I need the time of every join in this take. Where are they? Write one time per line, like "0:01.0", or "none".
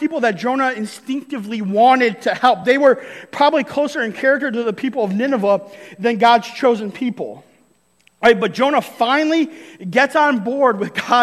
none